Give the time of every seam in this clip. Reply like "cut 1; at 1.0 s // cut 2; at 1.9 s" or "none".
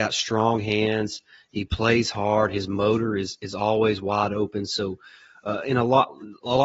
none